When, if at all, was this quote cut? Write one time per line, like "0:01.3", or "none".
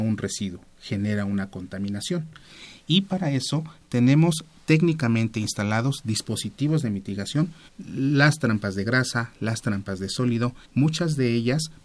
0:07.7
0:10.6